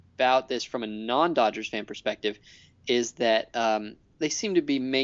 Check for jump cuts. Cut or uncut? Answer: cut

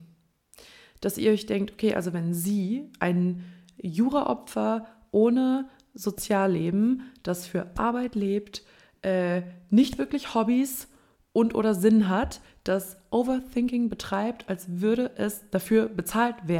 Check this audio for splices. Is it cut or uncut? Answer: uncut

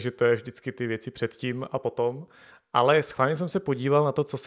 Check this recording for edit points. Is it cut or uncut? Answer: uncut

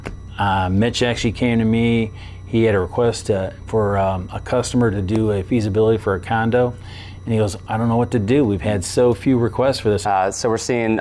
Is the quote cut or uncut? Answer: cut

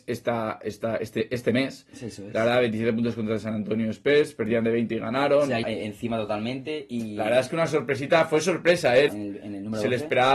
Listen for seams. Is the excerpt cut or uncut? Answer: cut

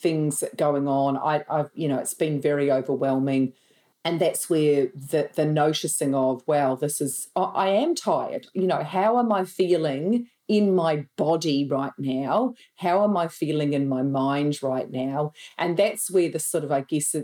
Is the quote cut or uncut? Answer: uncut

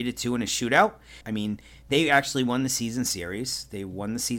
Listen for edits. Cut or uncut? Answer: cut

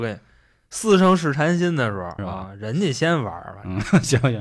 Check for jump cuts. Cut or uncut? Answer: cut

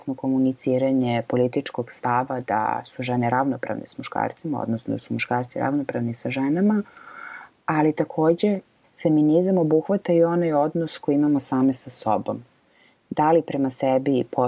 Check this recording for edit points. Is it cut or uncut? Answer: uncut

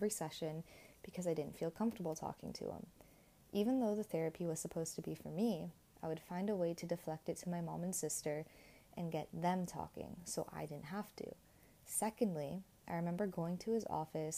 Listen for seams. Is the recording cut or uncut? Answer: uncut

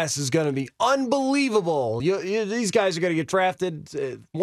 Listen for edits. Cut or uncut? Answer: uncut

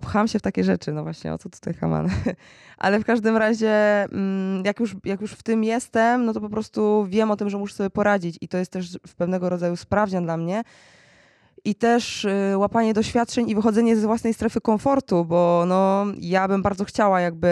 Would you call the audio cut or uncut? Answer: uncut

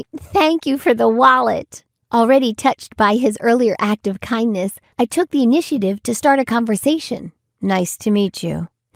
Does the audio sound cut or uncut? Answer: cut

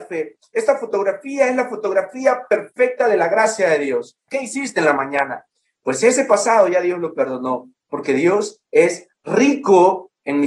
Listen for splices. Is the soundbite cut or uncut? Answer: cut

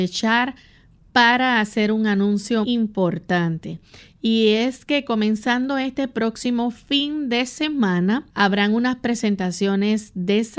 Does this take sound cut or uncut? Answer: cut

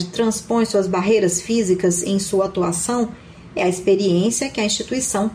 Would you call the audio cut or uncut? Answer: uncut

